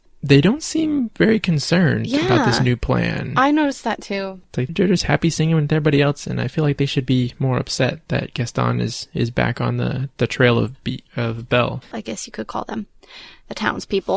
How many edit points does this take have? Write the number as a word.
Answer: two